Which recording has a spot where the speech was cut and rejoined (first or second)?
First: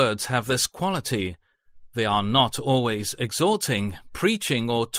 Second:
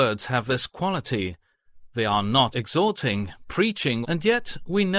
second